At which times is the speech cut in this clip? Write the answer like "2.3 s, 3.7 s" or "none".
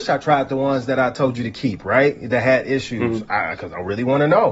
none